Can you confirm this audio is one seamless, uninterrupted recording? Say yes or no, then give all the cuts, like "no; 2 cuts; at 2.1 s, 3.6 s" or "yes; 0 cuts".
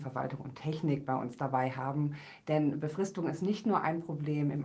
yes; 0 cuts